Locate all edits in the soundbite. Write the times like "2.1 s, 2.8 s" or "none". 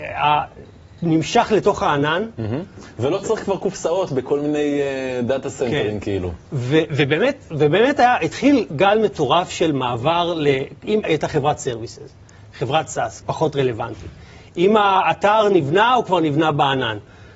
11.0 s, 13.2 s

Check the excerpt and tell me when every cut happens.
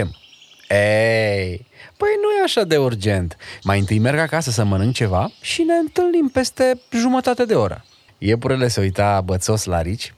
3.6 s, 8.1 s

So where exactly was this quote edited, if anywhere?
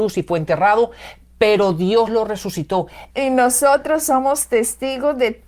3.1 s

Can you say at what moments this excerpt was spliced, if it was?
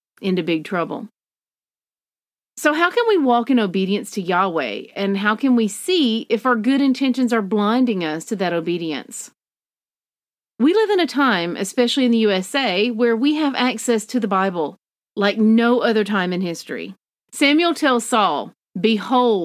17.3 s

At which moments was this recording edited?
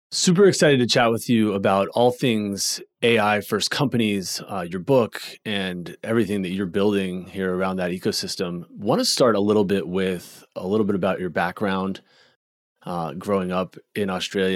none

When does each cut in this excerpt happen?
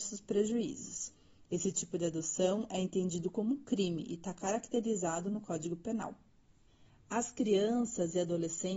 none

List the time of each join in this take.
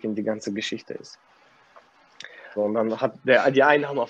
2.6 s

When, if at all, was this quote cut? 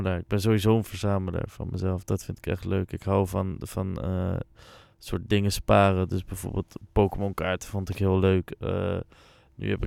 none

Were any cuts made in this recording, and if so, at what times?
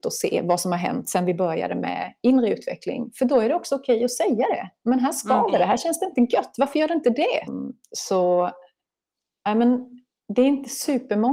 7.5 s

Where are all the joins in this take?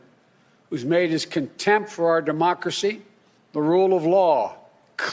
3.4 s

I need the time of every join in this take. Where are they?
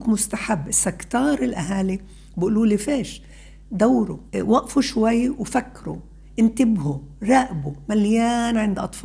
4.3 s

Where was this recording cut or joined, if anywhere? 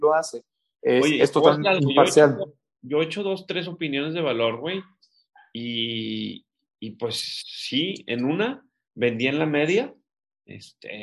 none

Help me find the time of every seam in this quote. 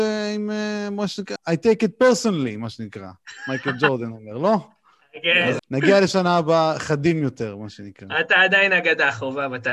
1.4 s, 5.6 s

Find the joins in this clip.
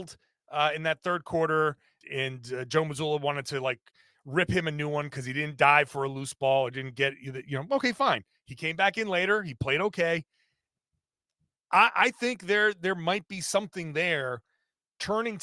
2.0 s

